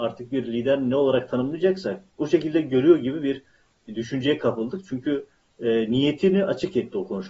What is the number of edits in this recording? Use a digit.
0